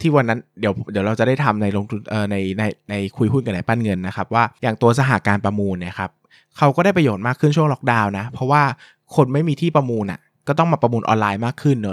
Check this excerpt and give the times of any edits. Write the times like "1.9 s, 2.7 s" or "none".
none